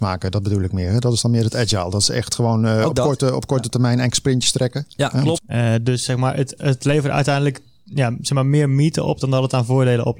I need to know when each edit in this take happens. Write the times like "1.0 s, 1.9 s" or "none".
5.4 s, 6.6 s